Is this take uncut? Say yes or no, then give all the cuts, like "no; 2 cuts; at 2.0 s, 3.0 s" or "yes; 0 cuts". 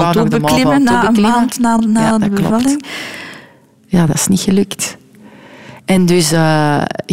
yes; 0 cuts